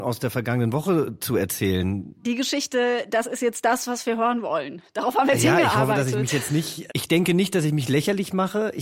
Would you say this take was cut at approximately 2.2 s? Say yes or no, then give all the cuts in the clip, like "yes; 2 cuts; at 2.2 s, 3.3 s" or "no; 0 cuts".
yes; 2 cuts; at 2.2 s, 6.9 s